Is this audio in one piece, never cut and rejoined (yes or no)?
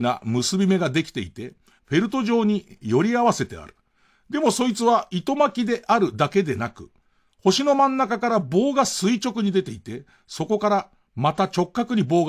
no